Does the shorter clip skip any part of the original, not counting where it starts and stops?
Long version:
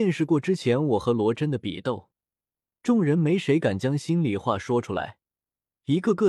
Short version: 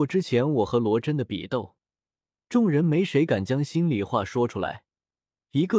no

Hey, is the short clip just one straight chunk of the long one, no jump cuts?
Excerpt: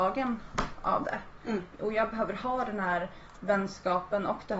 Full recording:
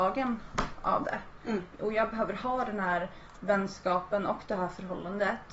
yes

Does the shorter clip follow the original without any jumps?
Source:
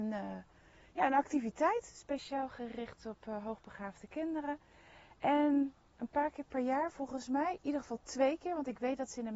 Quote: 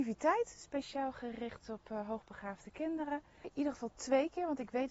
no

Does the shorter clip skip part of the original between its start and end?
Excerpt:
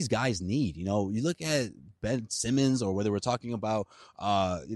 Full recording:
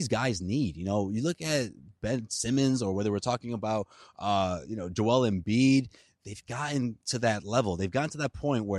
no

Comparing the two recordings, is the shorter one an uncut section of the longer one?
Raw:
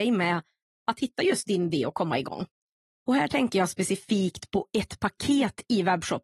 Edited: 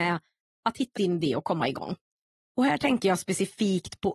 no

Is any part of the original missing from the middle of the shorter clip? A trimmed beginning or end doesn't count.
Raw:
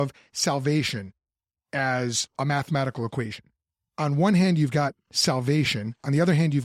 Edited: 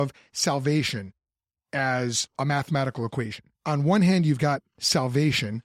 yes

